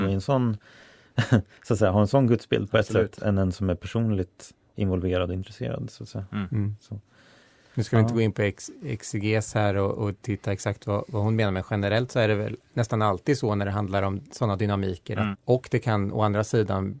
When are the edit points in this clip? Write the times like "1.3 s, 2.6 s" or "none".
15.3 s